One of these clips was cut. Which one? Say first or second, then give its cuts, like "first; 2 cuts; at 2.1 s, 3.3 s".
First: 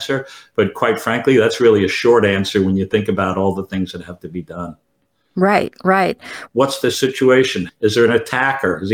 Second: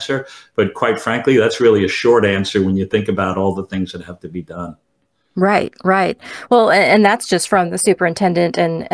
first; 2 cuts; at 6.5 s, 7.7 s